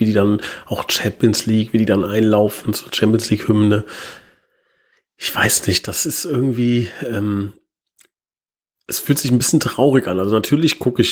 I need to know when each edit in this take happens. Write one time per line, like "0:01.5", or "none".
none